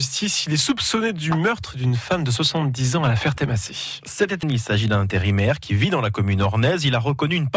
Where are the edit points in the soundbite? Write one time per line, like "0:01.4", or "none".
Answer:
0:04.4